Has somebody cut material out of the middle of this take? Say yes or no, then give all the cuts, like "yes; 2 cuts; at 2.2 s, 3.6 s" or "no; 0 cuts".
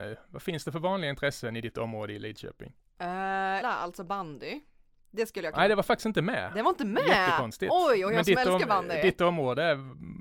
yes; 1 cut; at 3.6 s